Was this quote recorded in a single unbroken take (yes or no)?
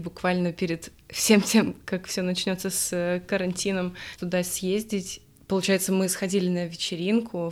yes